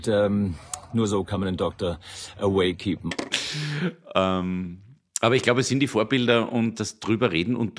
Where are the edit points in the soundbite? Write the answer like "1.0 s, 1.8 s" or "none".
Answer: 6.7 s

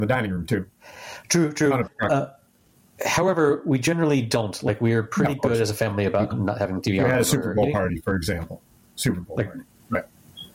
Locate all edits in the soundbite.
6.3 s

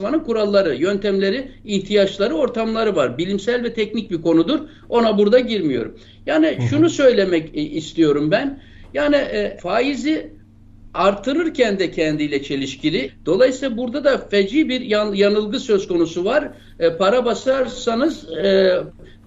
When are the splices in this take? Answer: 9.6 s, 13.1 s

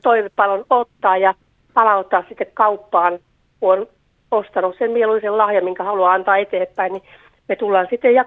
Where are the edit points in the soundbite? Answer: none

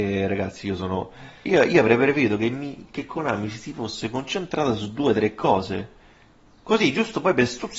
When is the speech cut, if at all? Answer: 1.4 s

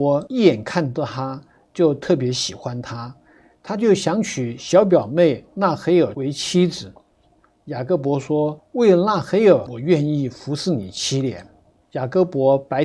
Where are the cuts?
7.2 s, 11.8 s

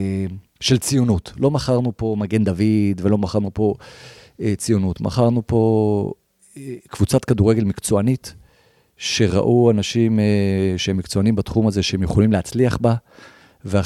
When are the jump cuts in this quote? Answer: none

